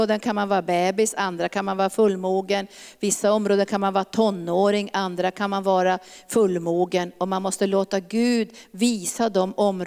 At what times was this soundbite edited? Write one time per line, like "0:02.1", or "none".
none